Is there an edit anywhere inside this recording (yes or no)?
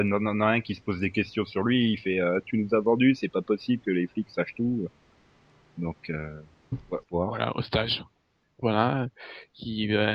yes